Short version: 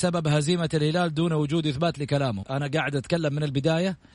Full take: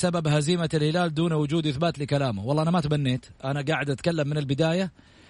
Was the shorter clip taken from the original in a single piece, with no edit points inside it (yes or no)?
no